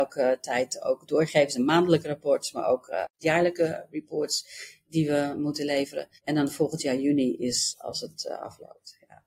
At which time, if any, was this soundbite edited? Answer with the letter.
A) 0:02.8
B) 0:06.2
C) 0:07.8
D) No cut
B